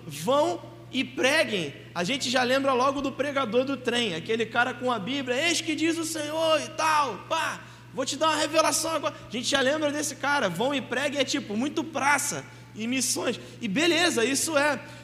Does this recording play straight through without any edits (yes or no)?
yes